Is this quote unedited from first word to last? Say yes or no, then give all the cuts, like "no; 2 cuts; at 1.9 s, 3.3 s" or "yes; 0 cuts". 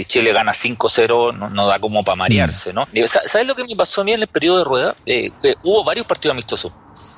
no; 1 cut; at 2.9 s